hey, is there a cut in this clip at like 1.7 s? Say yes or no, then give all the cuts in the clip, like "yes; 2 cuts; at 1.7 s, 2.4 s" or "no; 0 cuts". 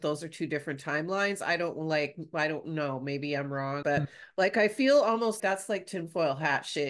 no; 2 cuts; at 3.8 s, 5.4 s